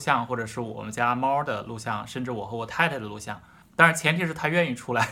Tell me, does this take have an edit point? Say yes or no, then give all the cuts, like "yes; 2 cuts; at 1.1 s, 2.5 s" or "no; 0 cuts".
yes; 1 cut; at 3.6 s